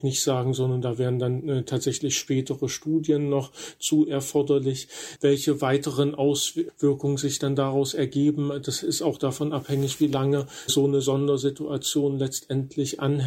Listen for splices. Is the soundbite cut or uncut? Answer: cut